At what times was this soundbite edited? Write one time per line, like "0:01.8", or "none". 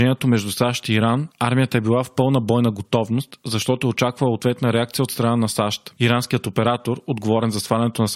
none